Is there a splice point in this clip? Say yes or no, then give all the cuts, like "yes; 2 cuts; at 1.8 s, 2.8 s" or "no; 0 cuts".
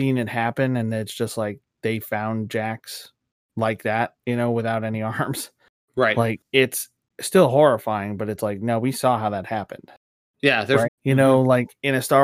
yes; 2 cuts; at 4.2 s, 10.8 s